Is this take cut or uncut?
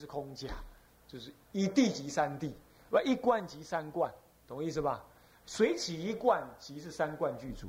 uncut